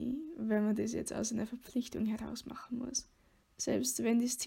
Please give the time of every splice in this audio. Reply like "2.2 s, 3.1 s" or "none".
3.4 s